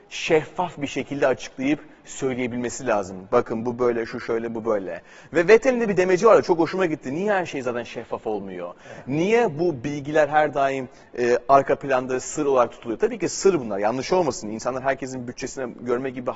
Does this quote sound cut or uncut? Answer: uncut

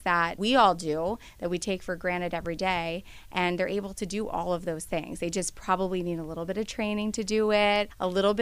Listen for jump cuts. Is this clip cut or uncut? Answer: uncut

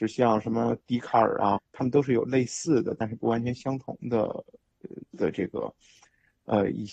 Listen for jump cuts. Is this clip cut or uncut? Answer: cut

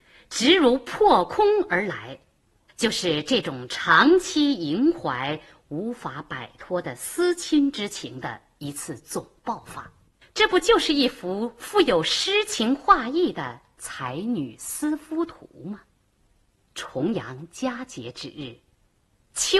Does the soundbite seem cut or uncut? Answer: cut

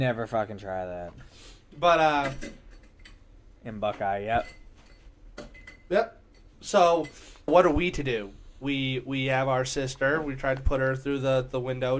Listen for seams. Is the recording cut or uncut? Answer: cut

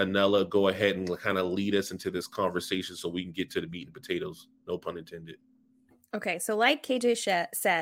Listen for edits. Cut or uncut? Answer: uncut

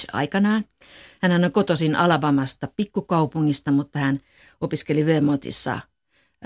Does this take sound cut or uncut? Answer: uncut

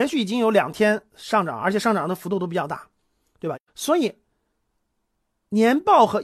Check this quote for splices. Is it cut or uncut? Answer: cut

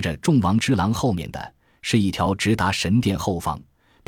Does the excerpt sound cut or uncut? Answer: uncut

